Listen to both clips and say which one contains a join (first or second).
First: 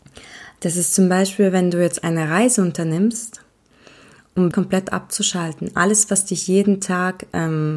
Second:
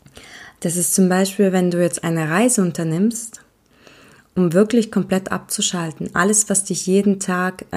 first